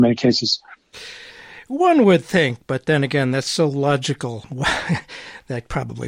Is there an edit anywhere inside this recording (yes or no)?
no